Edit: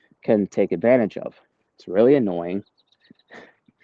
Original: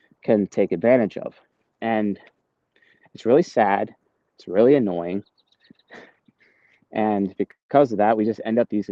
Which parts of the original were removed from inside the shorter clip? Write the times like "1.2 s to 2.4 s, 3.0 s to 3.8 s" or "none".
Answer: 1.7 s to 4.3 s